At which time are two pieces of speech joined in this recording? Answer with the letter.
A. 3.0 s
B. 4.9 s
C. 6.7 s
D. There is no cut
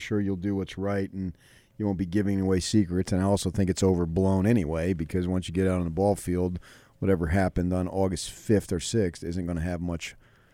D